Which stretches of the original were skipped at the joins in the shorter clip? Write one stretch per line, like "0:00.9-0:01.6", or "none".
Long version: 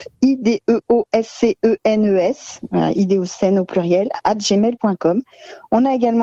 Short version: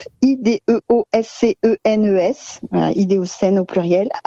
none